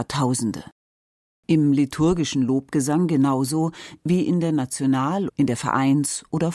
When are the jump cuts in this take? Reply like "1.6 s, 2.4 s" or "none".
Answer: 1.3 s, 5.3 s